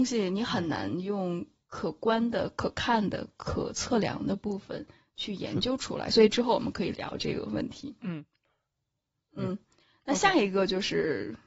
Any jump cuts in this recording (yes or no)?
yes